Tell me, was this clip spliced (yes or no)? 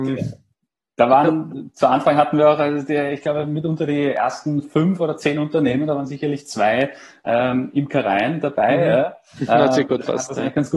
no